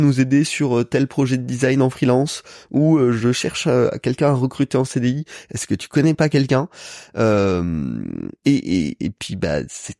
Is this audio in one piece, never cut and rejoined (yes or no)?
yes